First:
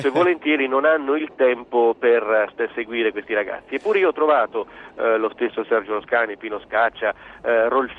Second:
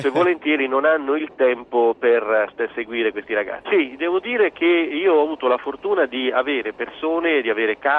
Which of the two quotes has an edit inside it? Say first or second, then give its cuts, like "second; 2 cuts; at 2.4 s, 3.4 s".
second; 1 cut; at 3.6 s